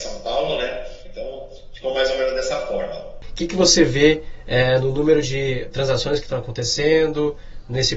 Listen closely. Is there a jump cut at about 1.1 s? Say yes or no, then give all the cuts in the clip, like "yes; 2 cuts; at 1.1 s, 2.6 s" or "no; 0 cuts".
yes; 2 cuts; at 1.1 s, 3.2 s